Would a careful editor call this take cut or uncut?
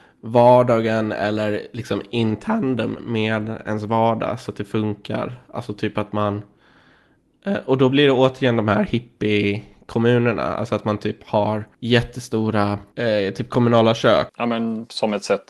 cut